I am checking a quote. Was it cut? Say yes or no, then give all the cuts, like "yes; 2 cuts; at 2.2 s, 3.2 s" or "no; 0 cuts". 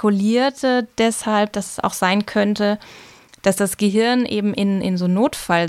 no; 0 cuts